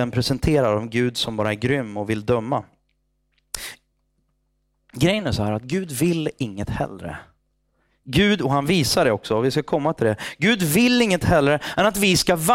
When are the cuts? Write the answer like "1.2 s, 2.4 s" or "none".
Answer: none